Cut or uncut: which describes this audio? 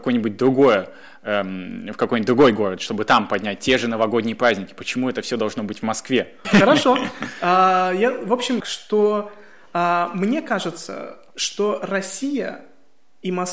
cut